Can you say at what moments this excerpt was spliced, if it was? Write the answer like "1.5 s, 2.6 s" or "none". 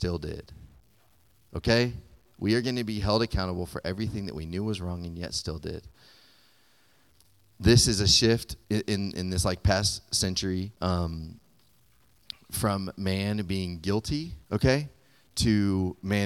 8.6 s, 10.7 s, 14.4 s

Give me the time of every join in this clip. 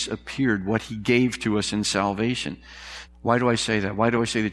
3.1 s

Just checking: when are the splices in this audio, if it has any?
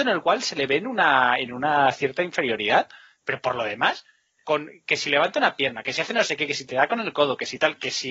5.8 s

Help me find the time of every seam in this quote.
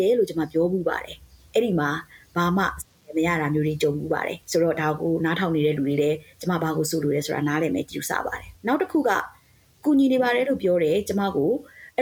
4.4 s, 8.6 s

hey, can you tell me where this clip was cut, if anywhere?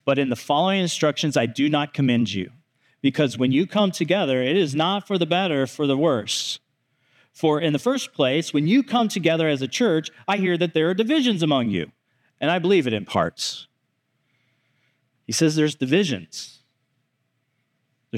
none

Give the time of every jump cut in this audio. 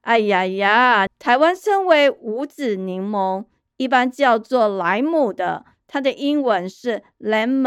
1.1 s

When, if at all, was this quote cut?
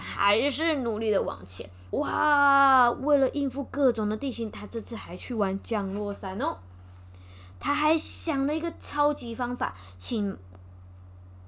1.9 s, 7.5 s

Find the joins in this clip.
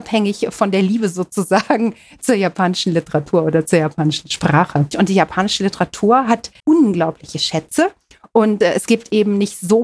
4.9 s, 6.6 s

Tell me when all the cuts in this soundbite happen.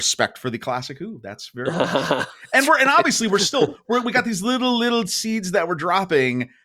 none

